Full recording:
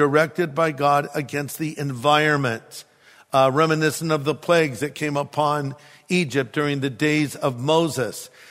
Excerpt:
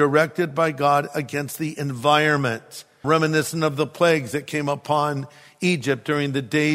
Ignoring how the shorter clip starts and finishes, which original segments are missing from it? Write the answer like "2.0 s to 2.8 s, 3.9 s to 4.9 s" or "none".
3.0 s to 3.5 s